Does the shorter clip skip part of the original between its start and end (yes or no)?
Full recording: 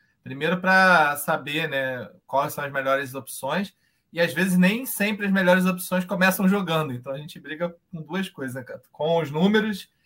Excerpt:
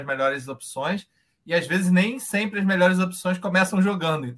no